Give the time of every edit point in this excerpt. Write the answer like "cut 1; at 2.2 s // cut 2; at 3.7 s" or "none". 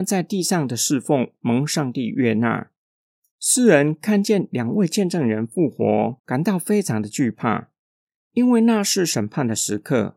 cut 1; at 3.3 s